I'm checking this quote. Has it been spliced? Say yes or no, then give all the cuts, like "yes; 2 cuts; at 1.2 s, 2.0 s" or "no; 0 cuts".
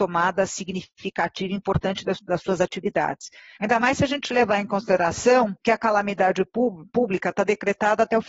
yes; 3 cuts; at 2.2 s, 3.6 s, 5.6 s